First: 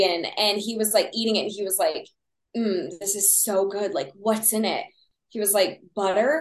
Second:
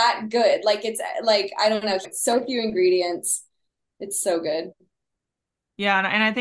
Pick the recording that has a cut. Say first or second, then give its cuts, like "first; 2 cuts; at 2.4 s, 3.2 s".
second; 1 cut; at 2.0 s